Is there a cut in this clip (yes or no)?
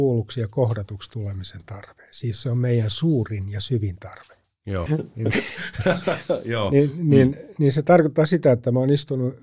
yes